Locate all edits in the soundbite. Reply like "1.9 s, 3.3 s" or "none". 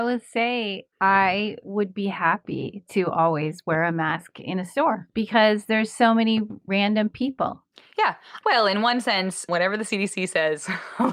8.4 s